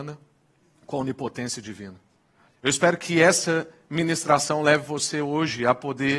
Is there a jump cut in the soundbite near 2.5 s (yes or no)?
yes